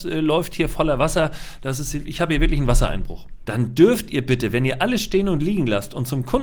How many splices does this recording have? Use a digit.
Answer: 1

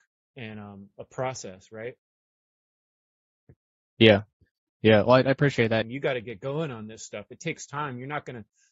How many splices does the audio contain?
1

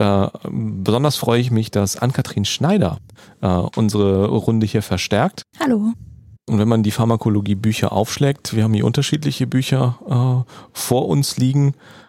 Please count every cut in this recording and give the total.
1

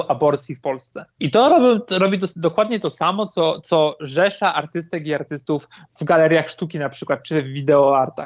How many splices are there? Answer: 1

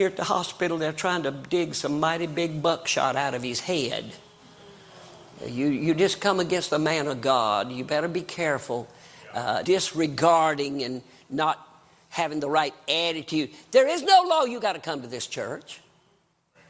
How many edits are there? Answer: 1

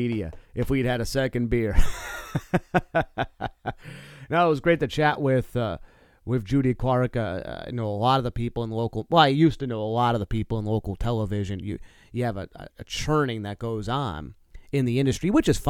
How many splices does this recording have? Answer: 1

